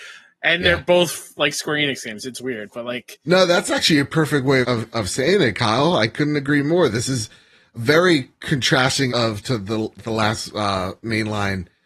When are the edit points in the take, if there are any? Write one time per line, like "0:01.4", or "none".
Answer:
0:04.6
0:09.1